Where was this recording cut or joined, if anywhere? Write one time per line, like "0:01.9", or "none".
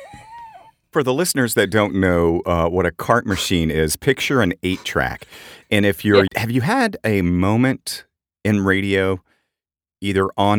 0:06.3